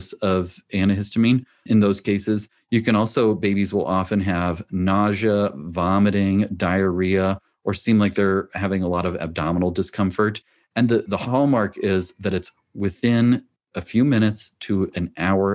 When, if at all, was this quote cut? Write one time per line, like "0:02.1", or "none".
0:02.6

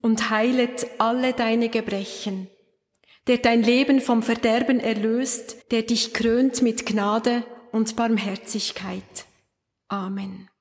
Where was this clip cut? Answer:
0:05.6

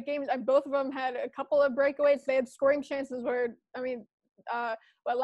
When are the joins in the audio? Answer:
none

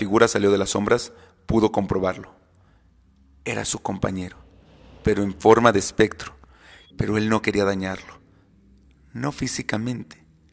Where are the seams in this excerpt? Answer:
0:06.9

